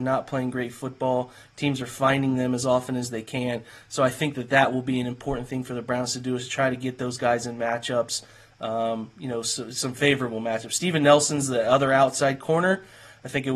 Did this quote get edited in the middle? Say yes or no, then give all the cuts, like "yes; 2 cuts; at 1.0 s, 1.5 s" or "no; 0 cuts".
no; 0 cuts